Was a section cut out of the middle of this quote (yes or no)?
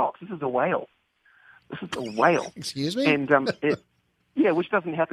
no